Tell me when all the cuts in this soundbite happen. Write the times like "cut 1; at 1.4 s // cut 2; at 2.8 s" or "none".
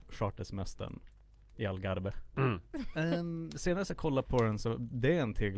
cut 1; at 2.7 s